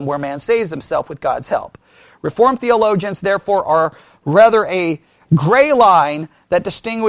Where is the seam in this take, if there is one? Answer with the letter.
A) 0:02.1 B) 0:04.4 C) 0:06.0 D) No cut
D